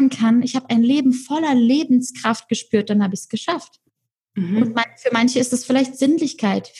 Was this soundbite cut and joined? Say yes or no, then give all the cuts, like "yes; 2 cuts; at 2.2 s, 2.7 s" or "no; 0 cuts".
no; 0 cuts